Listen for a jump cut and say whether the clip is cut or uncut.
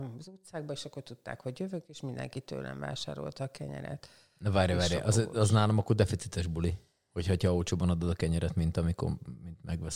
uncut